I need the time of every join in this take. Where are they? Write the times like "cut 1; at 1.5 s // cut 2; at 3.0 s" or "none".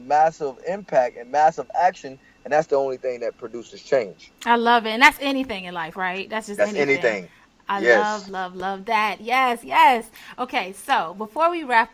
none